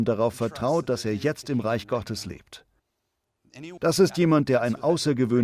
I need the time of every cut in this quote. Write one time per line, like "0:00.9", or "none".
0:03.8